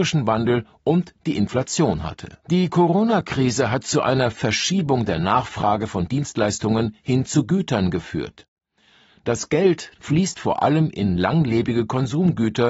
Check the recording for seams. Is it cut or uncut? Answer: cut